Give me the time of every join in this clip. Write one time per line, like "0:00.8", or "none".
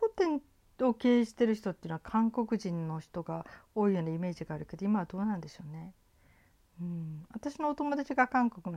none